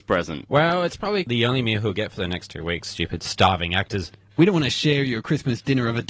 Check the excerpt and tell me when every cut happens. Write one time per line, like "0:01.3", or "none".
none